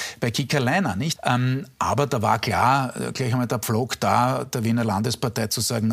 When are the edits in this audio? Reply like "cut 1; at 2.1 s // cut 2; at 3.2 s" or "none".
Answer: cut 1; at 1.2 s